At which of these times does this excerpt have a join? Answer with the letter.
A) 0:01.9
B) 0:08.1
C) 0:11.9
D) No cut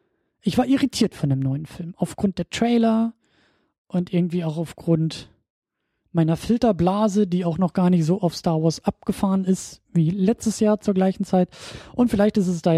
D